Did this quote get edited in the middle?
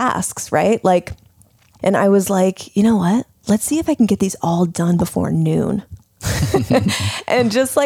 yes; 1 cut; at 1.8 s

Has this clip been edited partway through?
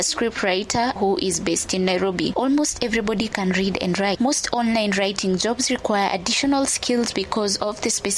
yes; 2 cuts; at 1.0 s, 2.3 s

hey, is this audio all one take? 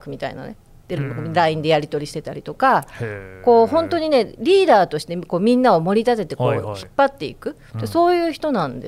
yes; 0 cuts

